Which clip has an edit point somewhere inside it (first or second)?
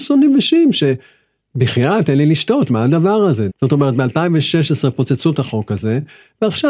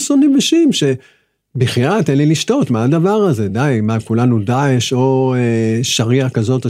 first